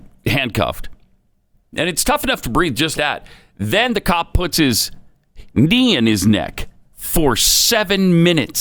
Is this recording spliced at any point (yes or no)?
yes